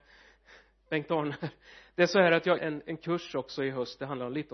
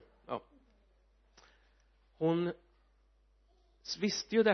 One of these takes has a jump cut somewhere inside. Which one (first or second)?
first